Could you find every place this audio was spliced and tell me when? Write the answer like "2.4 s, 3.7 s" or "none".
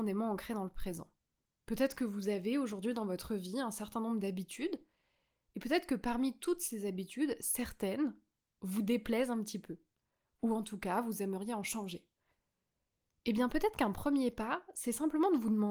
1.4 s